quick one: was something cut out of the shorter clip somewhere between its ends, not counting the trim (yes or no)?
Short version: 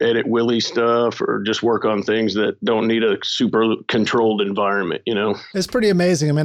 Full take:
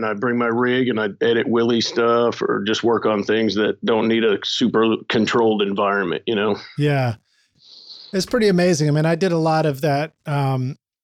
yes